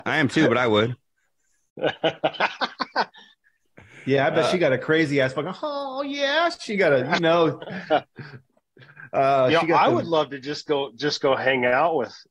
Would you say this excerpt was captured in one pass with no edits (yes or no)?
yes